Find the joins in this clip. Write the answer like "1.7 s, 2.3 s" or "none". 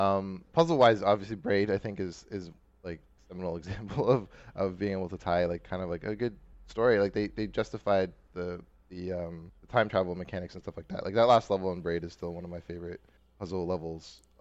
none